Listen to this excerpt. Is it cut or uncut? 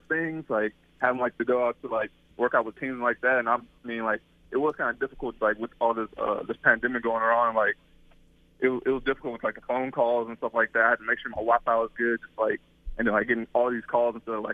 uncut